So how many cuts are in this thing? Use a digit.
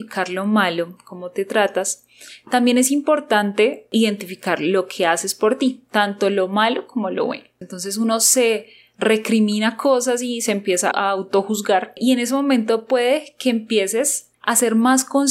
2